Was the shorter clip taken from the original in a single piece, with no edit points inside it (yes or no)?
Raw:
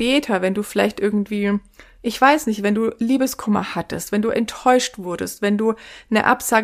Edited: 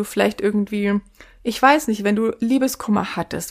yes